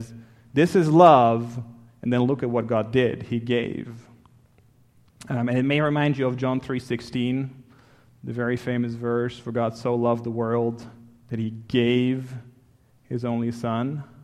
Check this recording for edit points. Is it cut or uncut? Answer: uncut